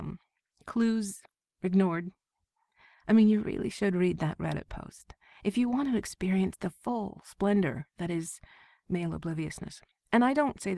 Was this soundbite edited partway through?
no; 0 cuts

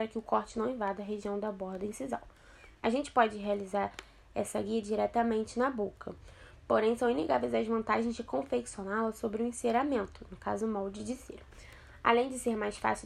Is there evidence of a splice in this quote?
no; 0 cuts

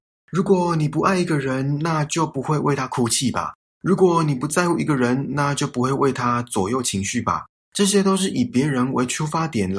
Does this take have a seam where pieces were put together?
no; 0 cuts

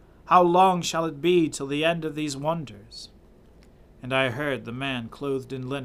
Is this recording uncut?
yes; 0 cuts

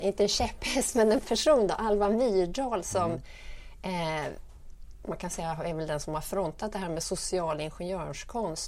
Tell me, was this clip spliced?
no; 0 cuts

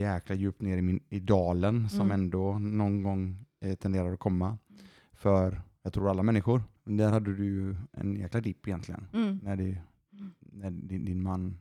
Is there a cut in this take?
yes; 1 cut; at 6.7 s

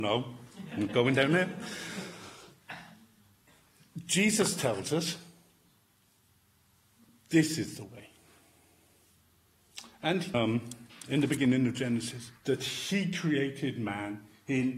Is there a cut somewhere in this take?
yes; 2 cuts; at 10.3 s, 12.4 s

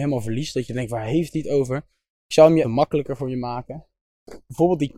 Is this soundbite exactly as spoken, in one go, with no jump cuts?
no; 1 cut; at 2.6 s

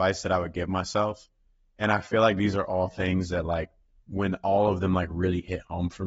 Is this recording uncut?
yes; 0 cuts

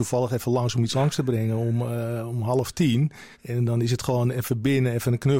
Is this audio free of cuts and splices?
no; 1 cut; at 3.3 s

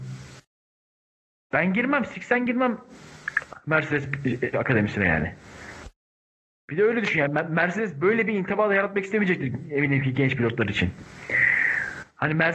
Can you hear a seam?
yes; 1 cut; at 4.5 s

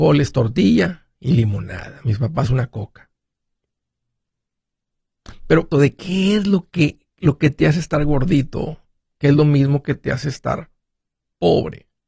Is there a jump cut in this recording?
yes; 1 cut; at 5.7 s

